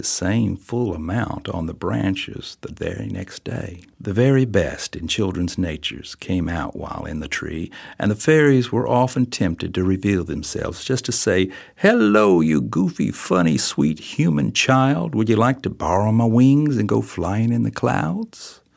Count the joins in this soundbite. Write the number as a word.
one